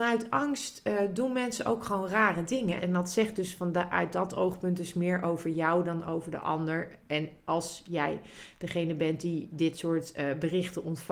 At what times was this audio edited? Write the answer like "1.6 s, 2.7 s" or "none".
2.8 s